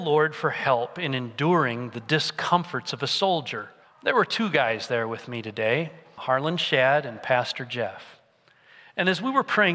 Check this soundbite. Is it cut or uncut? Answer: cut